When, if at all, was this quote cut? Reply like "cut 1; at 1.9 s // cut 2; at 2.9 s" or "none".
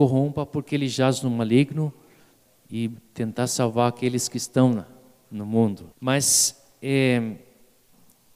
cut 1; at 5.9 s